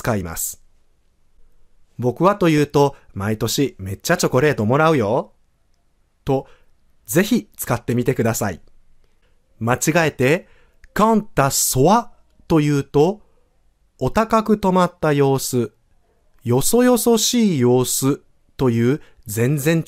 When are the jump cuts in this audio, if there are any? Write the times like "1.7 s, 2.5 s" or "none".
1.8 s

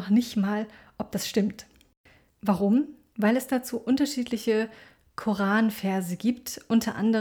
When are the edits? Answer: 2.3 s

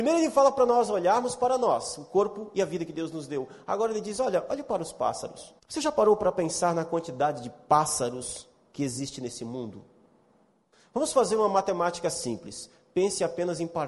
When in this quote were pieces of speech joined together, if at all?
5.6 s

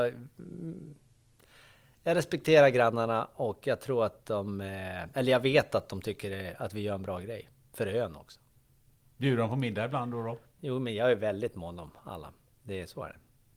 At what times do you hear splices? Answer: 10.6 s

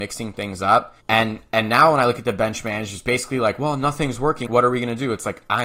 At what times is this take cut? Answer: 1.0 s, 4.5 s

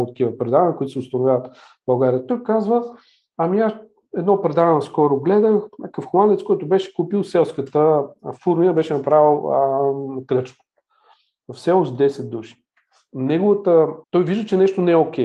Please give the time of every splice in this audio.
14.0 s

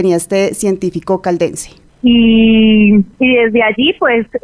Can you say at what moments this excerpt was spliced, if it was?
1.9 s, 3.1 s

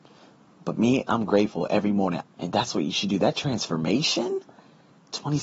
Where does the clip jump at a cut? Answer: 2.2 s

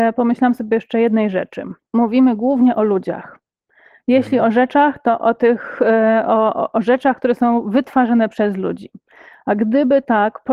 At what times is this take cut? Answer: none

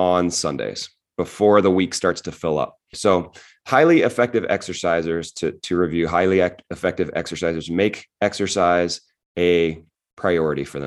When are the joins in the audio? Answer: 2.9 s

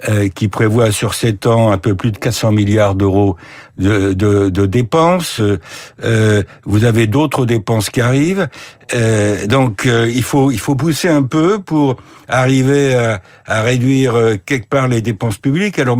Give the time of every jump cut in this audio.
none

